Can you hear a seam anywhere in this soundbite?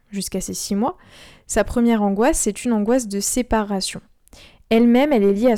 no; 0 cuts

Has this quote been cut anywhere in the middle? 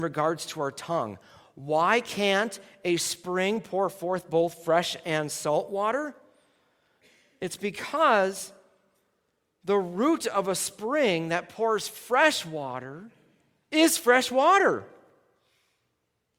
no; 0 cuts

